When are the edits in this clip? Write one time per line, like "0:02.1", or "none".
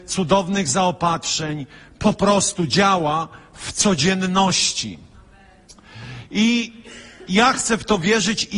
none